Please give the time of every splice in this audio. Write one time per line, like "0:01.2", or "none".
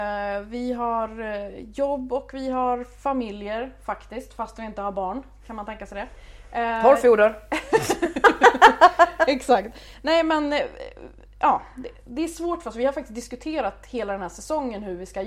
none